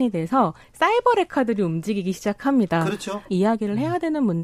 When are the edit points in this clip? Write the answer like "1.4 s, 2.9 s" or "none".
3.3 s